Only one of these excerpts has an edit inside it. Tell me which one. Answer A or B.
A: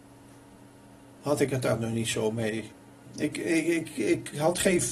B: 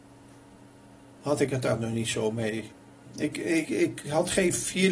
B